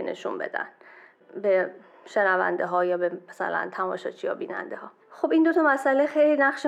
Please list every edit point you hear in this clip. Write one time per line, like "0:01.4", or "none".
0:05.0